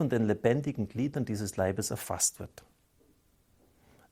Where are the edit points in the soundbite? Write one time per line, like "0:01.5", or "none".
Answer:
none

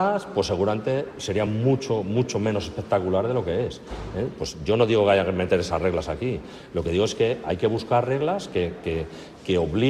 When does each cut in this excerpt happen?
none

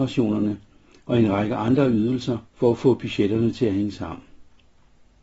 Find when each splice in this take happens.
0:02.5

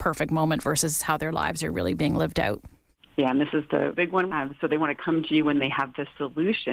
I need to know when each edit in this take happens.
0:04.3

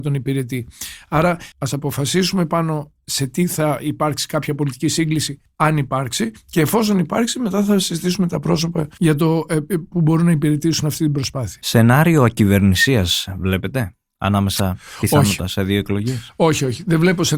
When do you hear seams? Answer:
0:01.5

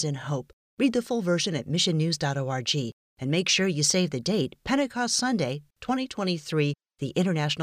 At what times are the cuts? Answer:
0:05.7

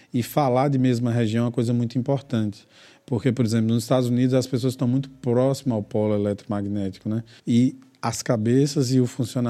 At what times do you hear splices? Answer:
0:07.4

